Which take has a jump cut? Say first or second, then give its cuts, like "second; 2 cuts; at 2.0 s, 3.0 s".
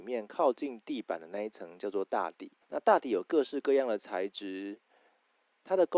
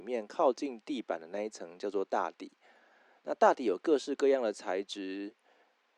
first; 1 cut; at 2.6 s